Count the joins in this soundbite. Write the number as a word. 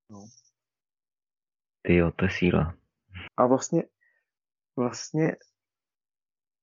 one